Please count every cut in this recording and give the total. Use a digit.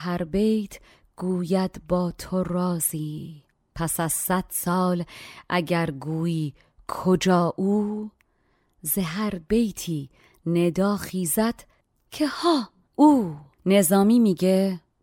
1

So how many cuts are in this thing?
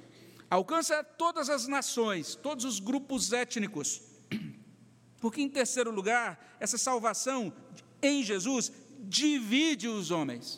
1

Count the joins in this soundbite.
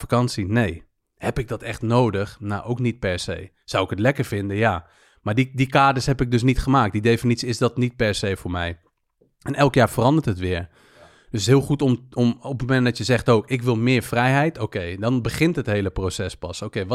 0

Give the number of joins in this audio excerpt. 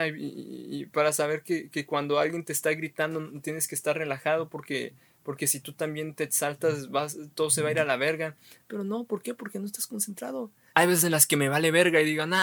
2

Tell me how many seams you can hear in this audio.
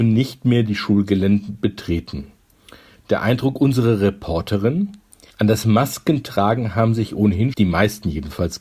2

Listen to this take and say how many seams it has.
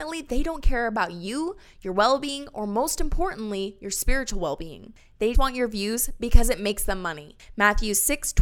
1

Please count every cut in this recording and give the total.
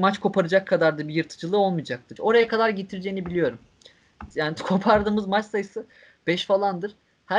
2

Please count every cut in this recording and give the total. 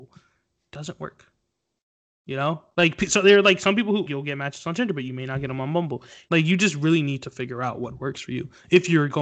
2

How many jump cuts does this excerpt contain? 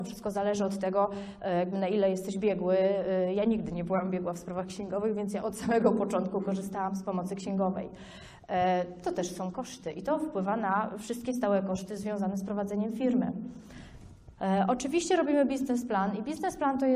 1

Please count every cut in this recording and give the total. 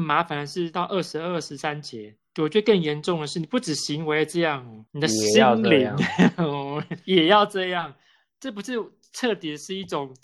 1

